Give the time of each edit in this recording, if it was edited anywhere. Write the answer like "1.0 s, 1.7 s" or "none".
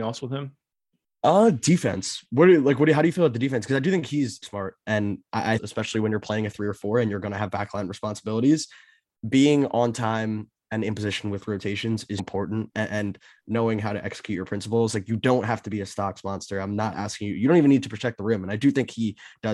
4.4 s, 5.6 s, 12.2 s